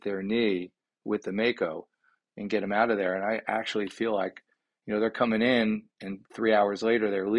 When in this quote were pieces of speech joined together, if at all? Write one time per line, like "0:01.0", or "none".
0:02.3